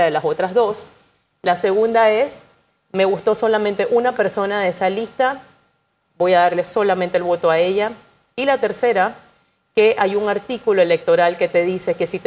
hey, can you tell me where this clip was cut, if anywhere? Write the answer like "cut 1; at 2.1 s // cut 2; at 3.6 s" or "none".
none